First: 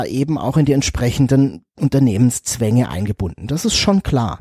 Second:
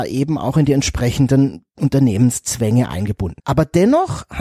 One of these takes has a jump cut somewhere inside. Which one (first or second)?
second